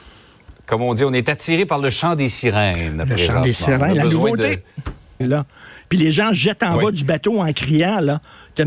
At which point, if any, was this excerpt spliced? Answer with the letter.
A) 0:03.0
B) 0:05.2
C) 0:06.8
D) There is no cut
B